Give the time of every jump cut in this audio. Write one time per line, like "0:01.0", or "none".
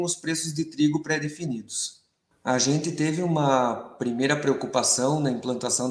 0:02.3